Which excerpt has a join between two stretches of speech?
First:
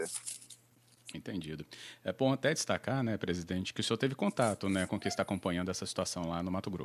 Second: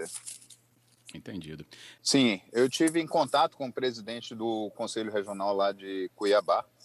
second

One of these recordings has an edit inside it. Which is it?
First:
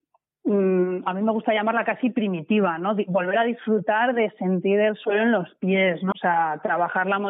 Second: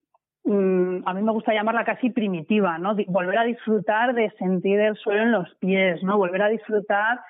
first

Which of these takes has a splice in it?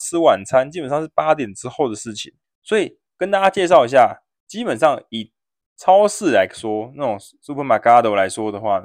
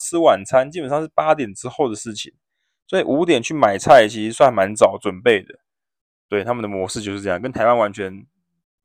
first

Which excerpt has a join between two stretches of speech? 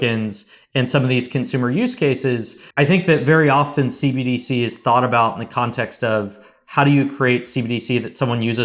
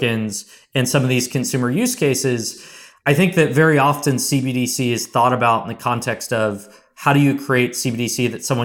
first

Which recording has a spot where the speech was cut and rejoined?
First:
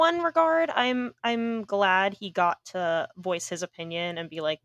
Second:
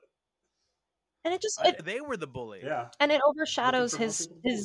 second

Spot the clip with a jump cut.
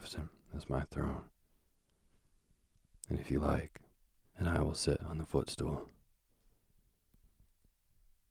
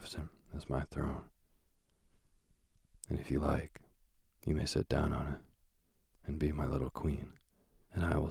first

